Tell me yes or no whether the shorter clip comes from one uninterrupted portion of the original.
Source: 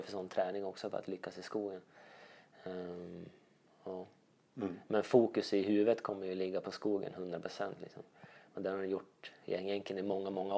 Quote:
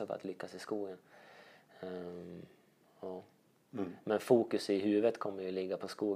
yes